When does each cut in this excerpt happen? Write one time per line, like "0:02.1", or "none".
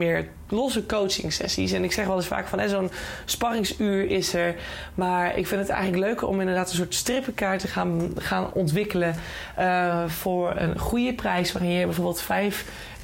none